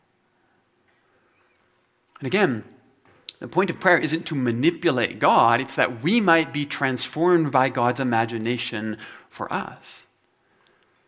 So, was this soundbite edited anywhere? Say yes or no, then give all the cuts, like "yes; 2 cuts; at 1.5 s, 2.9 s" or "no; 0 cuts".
no; 0 cuts